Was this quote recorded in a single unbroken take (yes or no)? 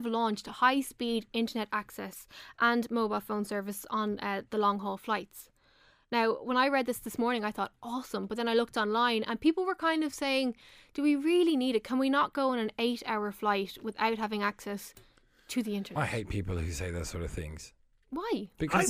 yes